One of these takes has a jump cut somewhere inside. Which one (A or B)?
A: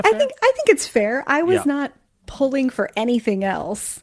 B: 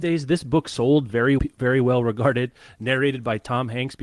B